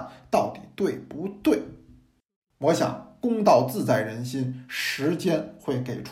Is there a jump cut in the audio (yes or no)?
no